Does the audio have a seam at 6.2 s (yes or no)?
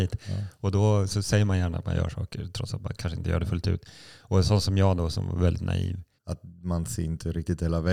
yes